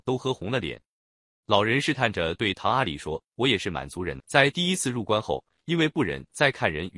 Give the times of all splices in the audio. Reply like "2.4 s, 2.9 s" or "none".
4.2 s